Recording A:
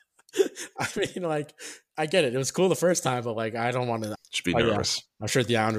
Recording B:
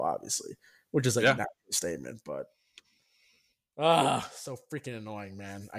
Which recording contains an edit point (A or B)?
A